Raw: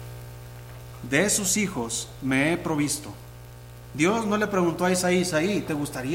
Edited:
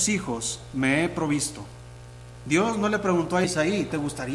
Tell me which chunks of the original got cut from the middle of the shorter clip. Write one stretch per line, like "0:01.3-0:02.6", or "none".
0:04.9-0:05.2